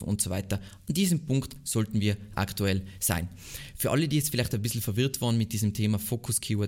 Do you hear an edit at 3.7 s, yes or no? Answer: no